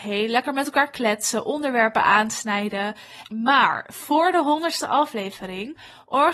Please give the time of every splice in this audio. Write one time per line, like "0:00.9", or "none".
0:03.2